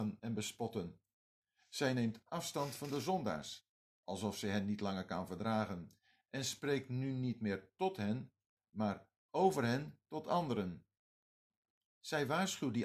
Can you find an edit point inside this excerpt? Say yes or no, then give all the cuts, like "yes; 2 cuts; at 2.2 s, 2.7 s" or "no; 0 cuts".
no; 0 cuts